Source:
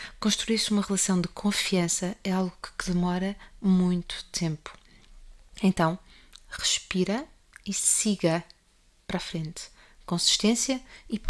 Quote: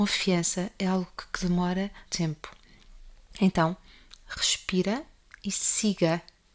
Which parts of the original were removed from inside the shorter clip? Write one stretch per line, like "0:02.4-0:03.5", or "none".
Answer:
0:03.5-0:04.3